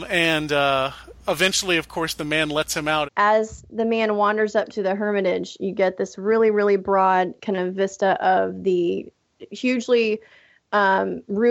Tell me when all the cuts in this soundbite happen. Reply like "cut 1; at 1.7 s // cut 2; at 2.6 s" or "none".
cut 1; at 3.0 s